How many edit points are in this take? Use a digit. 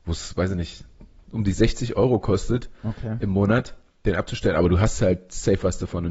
0